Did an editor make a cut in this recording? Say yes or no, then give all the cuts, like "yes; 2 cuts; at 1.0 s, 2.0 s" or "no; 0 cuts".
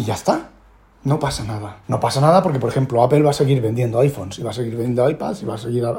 yes; 1 cut; at 1.8 s